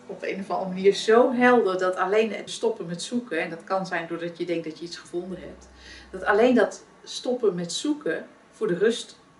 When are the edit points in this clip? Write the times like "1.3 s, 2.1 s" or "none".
2.5 s